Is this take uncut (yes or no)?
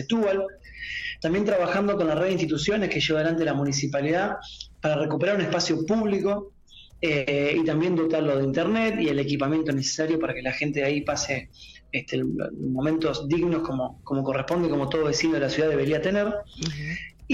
yes